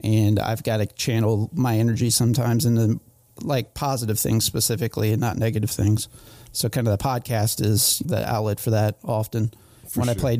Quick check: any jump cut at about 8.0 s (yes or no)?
yes